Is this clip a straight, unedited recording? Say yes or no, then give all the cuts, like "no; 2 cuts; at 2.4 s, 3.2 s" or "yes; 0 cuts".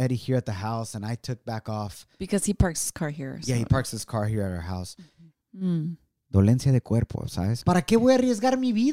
no; 2 cuts; at 5.4 s, 7.6 s